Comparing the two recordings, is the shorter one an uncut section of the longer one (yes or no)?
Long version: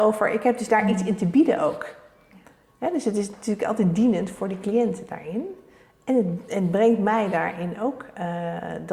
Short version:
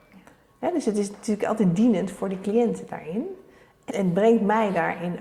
no